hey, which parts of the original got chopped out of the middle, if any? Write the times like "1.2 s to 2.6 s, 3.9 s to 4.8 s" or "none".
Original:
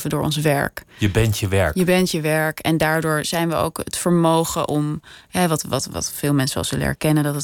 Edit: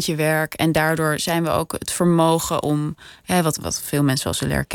5.6 s to 5.9 s